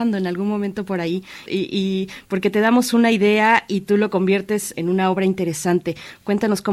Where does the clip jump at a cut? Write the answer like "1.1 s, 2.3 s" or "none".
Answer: 1.5 s, 4.7 s